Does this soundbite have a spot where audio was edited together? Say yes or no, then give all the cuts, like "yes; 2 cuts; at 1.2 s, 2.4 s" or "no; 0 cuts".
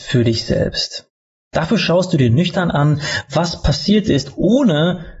no; 0 cuts